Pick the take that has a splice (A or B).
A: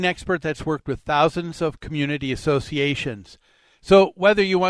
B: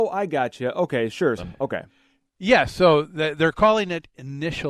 B